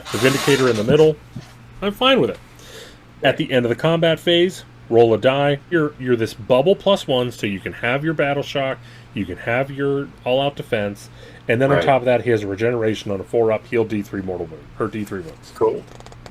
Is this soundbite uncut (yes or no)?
no